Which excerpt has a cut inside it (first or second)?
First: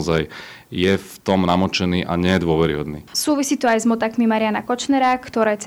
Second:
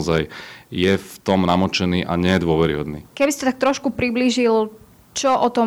second